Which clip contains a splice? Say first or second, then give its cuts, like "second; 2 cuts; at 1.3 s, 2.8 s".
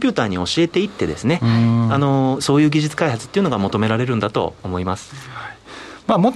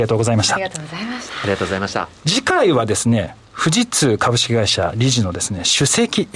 first; 1 cut; at 2.4 s